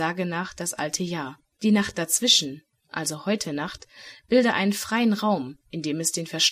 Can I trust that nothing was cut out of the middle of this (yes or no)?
no